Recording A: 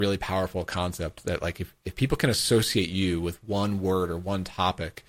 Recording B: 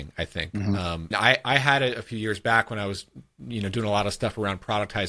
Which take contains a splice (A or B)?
B